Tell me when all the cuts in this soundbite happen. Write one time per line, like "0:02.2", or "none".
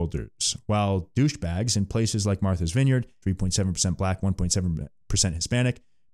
0:03.2